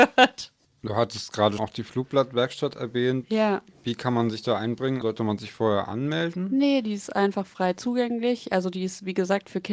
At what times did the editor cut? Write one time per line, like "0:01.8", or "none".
0:01.6
0:05.0